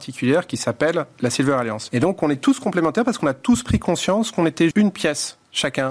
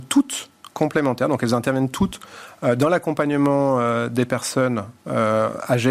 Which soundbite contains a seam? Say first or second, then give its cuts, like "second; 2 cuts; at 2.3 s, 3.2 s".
first; 2 cuts; at 1.9 s, 4.7 s